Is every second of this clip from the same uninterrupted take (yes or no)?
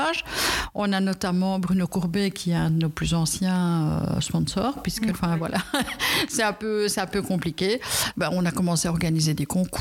no